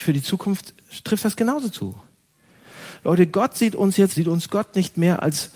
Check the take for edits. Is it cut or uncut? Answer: cut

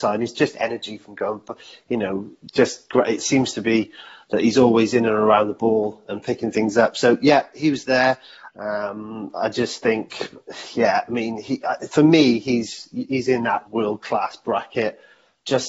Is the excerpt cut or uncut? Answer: cut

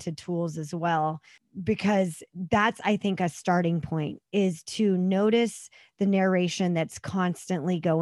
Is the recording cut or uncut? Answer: uncut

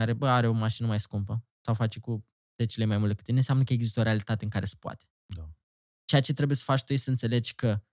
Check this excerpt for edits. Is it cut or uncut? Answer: uncut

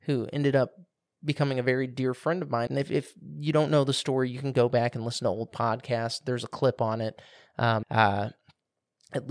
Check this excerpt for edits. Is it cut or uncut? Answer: cut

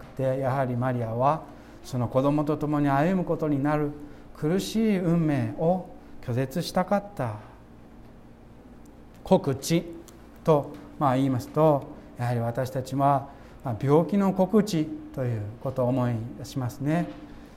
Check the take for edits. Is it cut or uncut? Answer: uncut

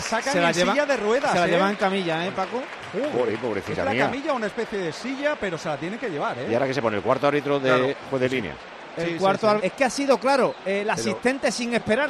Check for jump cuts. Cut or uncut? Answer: cut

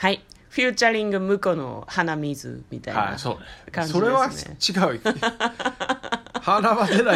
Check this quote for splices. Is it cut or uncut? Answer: uncut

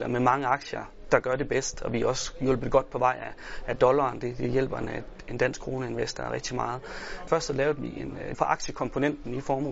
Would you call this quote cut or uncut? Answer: cut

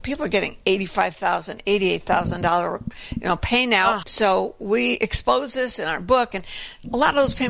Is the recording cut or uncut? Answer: cut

